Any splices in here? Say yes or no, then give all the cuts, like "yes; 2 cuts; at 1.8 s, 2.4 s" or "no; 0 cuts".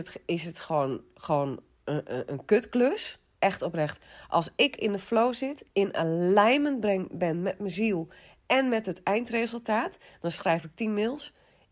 yes; 2 cuts; at 3.3 s, 10.1 s